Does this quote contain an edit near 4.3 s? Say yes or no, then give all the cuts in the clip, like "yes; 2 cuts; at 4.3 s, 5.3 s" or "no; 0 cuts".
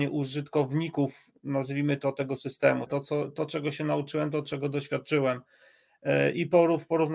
no; 1 cut; at 2.9 s